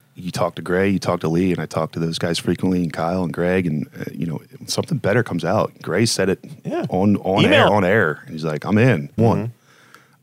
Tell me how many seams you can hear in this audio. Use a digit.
2